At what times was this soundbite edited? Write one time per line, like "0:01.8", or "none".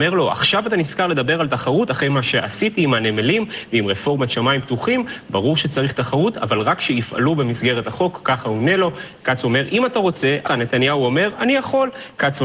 0:09.2
0:10.5